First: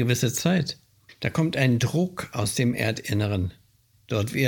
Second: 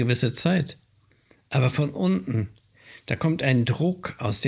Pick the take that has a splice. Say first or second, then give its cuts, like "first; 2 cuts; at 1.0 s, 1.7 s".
first; 1 cut; at 1.1 s